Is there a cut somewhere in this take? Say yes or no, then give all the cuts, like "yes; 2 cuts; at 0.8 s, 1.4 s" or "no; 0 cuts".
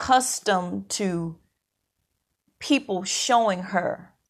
no; 0 cuts